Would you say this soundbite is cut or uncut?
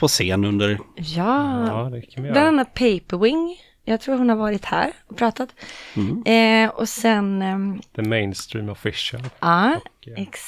uncut